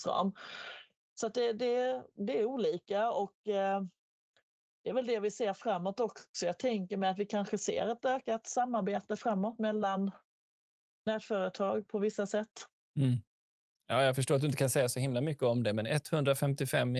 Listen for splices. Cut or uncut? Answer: uncut